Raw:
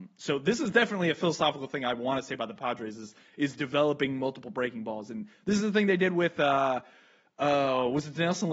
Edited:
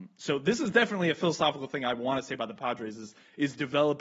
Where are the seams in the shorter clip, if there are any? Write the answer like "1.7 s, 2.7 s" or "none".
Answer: none

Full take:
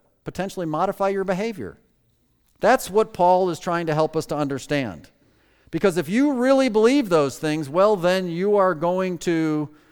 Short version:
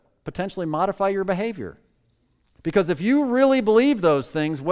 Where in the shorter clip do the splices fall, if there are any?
2.6 s

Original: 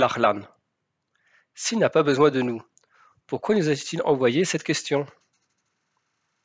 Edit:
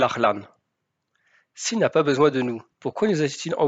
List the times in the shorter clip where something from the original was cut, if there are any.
2.7 s

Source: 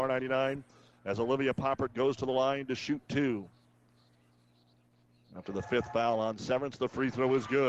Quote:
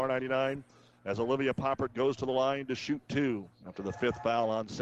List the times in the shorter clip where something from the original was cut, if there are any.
3.5 s

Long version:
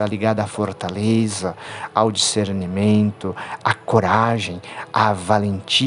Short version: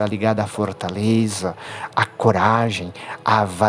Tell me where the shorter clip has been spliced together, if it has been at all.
1.9 s

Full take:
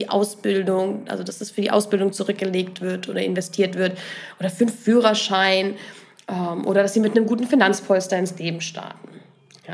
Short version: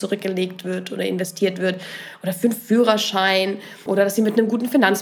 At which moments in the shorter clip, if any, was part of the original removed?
3.9 s

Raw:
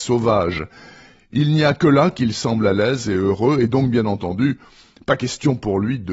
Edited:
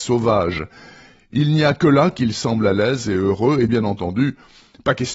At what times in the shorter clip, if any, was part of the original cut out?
3.7 s

